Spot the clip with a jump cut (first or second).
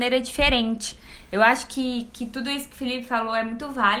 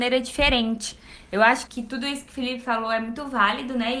second